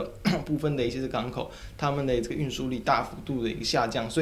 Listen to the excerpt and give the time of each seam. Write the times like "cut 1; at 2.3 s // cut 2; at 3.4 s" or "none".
none